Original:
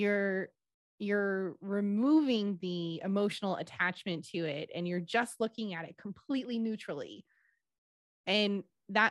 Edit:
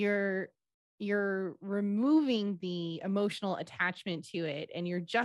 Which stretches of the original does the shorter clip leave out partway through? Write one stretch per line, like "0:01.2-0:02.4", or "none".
none